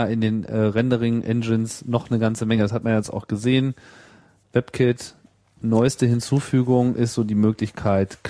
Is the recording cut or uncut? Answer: uncut